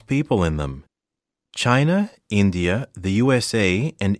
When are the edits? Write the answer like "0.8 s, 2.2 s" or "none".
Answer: none